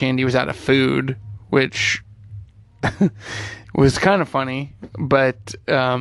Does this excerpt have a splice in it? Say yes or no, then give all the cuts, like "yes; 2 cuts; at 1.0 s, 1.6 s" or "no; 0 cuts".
no; 0 cuts